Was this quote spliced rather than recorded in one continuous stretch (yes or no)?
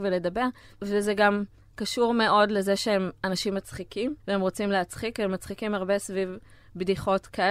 yes